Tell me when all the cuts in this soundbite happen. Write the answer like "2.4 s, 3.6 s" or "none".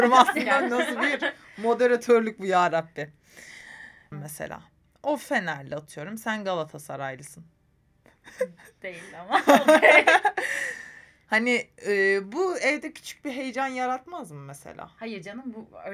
4.1 s